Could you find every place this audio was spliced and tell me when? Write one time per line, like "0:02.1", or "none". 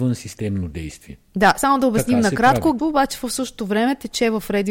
0:02.8